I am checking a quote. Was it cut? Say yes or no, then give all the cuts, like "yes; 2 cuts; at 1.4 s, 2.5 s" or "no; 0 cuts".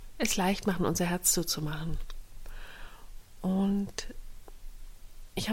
no; 0 cuts